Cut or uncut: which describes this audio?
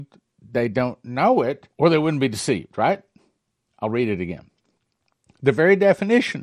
cut